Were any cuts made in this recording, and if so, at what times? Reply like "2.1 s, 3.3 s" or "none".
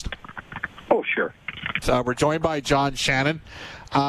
1.8 s